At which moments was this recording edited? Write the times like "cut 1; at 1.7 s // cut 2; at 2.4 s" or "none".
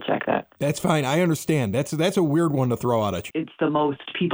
cut 1; at 3.3 s